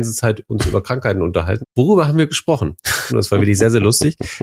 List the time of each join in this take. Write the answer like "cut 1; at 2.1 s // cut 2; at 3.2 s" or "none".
cut 1; at 1.6 s // cut 2; at 3.1 s